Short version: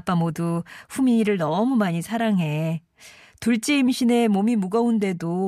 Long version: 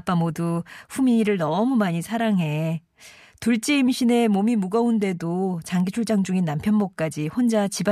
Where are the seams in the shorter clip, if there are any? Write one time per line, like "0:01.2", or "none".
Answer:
none